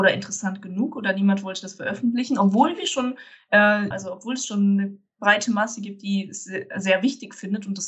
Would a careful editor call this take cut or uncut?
cut